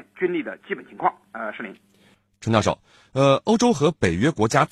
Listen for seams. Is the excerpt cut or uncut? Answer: uncut